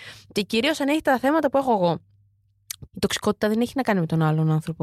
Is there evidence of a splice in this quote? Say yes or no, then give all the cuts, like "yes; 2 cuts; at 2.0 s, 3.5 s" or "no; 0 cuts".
yes; 1 cut; at 2.9 s